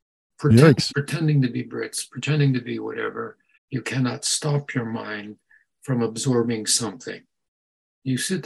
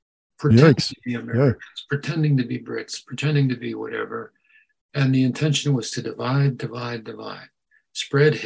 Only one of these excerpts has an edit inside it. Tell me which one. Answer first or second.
first